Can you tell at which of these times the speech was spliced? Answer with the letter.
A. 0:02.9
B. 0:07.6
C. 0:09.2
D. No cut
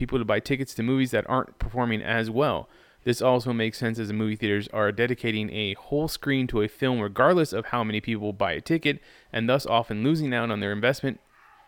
D